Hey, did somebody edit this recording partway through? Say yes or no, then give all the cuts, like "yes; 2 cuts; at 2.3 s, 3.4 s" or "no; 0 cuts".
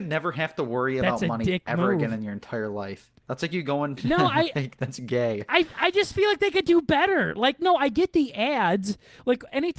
no; 0 cuts